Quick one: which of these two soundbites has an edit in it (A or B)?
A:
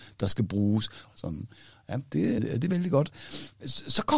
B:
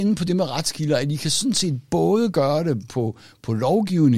A